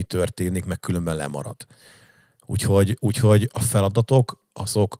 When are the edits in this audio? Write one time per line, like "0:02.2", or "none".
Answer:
none